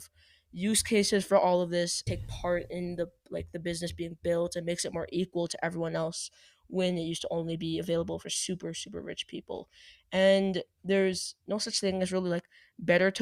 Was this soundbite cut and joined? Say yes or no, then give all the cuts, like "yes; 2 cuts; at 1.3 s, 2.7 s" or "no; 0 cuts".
yes; 1 cut; at 2.1 s